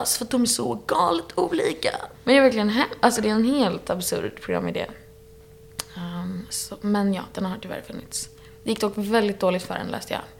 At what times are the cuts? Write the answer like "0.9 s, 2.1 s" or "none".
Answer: 2.1 s